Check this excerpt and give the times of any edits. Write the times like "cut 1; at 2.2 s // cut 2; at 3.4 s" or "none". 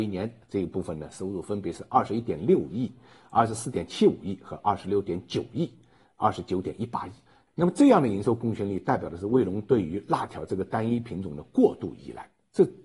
cut 1; at 7.5 s